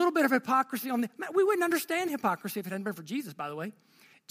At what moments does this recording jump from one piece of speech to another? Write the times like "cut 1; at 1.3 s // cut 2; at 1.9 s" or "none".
none